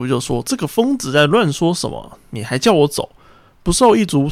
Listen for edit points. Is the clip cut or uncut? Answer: uncut